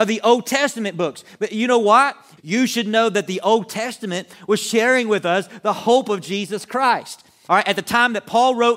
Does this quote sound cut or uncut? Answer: cut